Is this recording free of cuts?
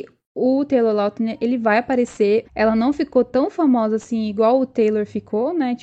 no; 1 cut; at 2.4 s

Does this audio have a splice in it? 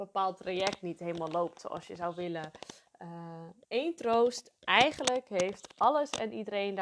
yes; 1 cut; at 3.6 s

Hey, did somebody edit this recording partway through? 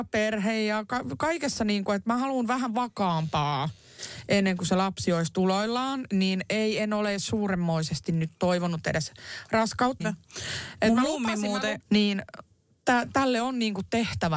yes; 2 cuts; at 10.0 s, 11.8 s

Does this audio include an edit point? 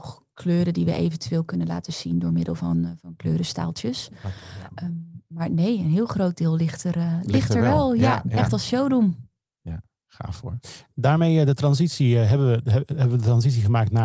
no; 0 cuts

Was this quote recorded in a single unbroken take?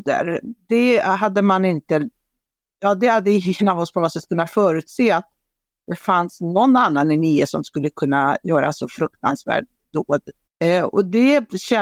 no; 1 cut; at 10.5 s

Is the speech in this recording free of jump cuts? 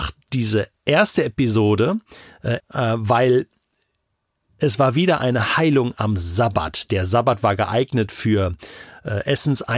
no; 1 cut; at 2.6 s

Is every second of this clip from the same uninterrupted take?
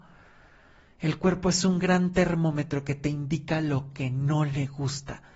yes; 0 cuts

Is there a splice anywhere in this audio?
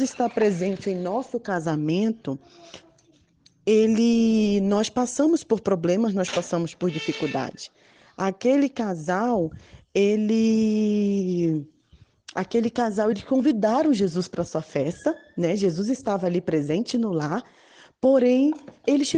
no; 0 cuts

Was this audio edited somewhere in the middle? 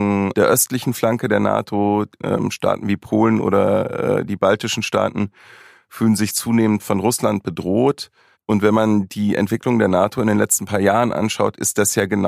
yes; 1 cut; at 8.3 s

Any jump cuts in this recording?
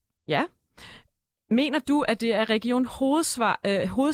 no; 0 cuts

